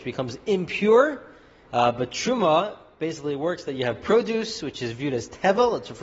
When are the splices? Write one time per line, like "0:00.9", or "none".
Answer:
0:01.6